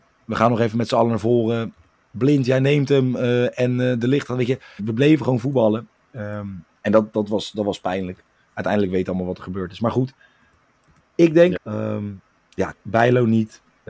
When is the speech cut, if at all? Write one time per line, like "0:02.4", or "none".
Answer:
0:04.8
0:11.6
0:12.7